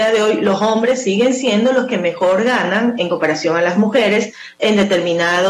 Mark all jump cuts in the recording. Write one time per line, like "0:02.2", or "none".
none